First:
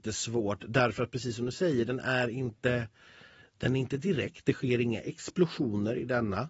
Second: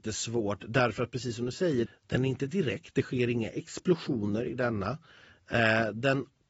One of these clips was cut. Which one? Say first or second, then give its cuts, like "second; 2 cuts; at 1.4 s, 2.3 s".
second; 1 cut; at 1.9 s